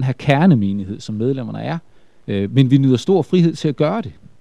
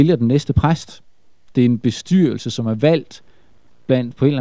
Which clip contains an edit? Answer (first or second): first